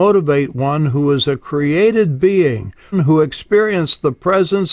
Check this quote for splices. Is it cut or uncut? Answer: cut